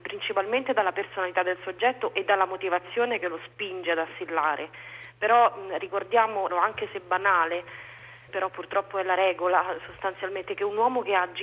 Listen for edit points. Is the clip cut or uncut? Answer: cut